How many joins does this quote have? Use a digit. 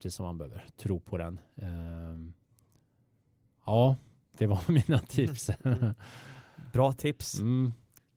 0